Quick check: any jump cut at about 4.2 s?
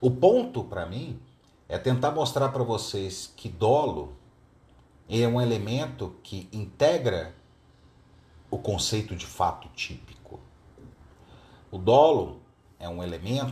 no; 0 cuts

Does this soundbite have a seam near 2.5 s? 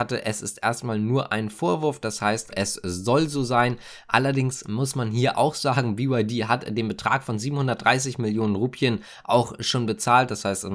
yes; 1 cut; at 2.5 s

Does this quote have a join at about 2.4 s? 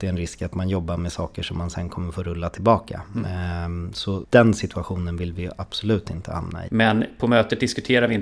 no; 2 cuts; at 4.2 s, 6.7 s

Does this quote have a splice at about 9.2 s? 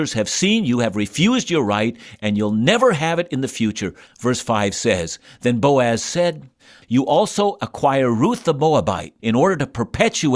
yes; 3 cuts; at 4.1 s, 6.8 s, 9.2 s

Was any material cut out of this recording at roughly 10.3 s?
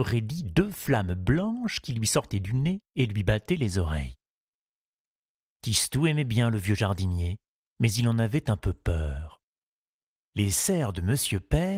yes; 1 cut; at 10.3 s

